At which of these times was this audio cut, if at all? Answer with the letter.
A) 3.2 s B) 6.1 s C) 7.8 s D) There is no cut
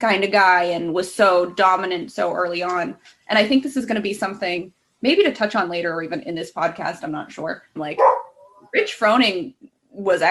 C